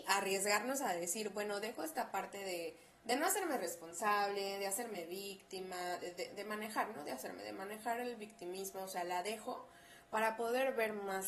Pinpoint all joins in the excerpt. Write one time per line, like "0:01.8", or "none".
none